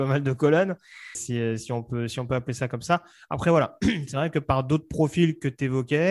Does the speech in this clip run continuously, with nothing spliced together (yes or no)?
no